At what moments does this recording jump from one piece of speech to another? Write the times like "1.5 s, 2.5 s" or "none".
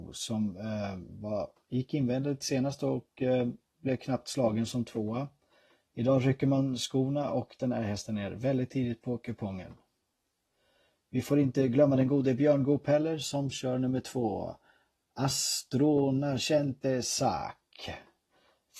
none